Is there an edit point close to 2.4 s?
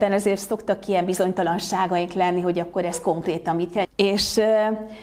no; 1 cut; at 3.8 s

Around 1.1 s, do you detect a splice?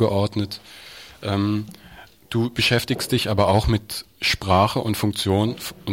no; 0 cuts

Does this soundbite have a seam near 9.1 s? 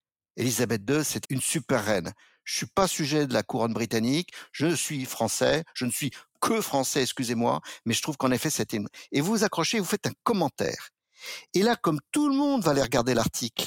no; 1 cut; at 1.2 s

